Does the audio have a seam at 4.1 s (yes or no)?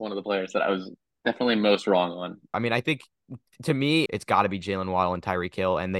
yes